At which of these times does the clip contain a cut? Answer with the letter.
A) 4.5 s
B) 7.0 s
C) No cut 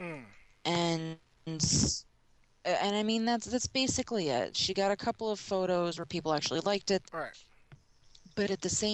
B